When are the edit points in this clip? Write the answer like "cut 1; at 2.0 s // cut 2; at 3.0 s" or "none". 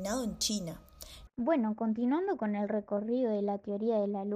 cut 1; at 1.3 s